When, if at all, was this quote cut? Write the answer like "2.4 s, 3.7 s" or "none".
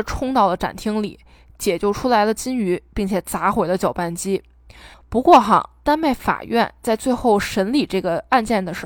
4.9 s